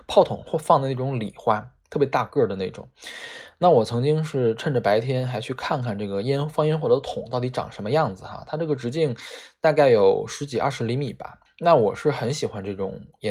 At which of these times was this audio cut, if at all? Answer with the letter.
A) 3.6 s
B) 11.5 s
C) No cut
B